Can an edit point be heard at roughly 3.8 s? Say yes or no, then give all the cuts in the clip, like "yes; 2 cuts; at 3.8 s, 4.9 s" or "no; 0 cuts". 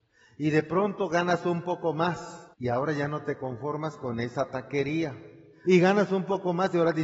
no; 2 cuts; at 2.5 s, 5.6 s